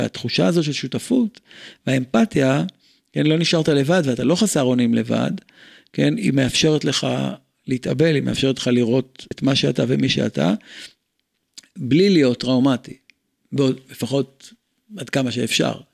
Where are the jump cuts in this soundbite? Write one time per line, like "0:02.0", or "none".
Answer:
0:09.3
0:13.6